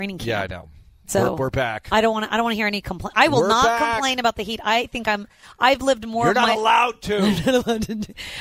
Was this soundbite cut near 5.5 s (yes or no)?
no